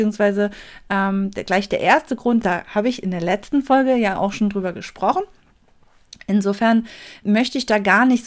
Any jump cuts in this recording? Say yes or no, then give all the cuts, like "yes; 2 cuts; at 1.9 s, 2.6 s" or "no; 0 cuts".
yes; 2 cuts; at 2.4 s, 7.2 s